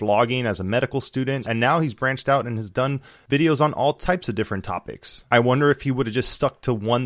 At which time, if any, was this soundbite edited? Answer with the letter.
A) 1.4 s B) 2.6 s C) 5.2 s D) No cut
A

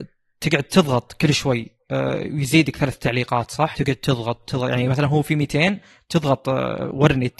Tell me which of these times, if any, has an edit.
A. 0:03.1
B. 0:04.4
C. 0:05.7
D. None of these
B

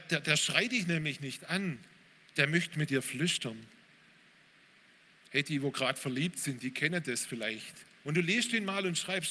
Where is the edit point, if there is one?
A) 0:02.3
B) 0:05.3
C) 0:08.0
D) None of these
C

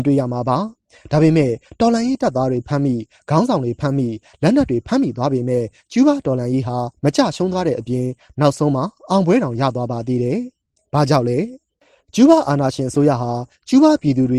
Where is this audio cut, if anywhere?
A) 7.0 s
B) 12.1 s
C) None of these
A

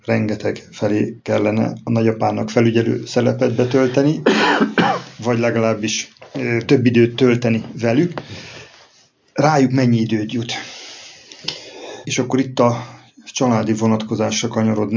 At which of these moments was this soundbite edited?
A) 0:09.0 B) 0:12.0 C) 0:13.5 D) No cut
B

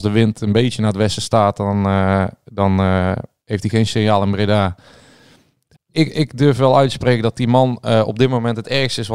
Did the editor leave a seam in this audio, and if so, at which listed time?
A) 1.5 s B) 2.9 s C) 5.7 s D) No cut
C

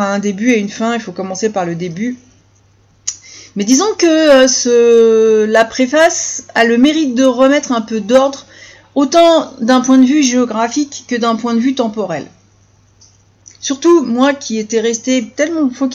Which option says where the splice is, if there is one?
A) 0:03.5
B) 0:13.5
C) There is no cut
C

